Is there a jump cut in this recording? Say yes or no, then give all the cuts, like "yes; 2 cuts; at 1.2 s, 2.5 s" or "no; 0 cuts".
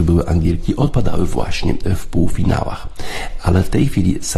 no; 0 cuts